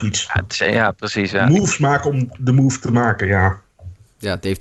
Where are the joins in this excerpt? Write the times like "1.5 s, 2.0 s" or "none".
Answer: none